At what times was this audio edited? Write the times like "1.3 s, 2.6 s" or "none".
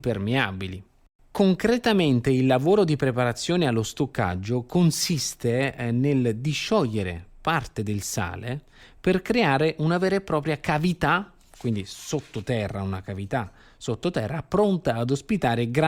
none

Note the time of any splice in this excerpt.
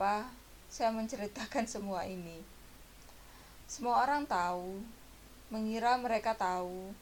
3.6 s

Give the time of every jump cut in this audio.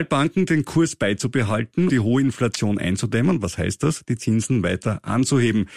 1.9 s

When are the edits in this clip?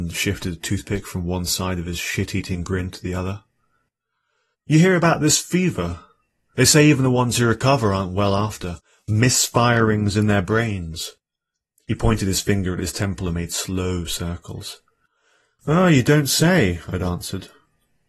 4.5 s

